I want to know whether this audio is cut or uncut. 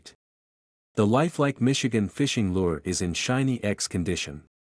uncut